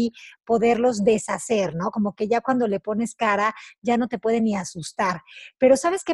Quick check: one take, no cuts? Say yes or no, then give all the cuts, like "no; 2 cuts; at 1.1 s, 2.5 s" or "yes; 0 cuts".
yes; 0 cuts